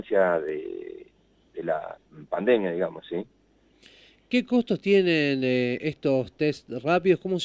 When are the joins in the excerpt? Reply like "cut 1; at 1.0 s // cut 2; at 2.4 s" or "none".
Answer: none